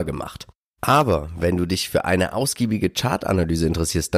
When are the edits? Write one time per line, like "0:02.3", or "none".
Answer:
none